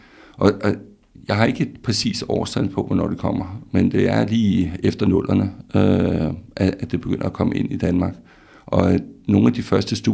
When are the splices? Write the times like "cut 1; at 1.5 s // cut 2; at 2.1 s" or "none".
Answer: none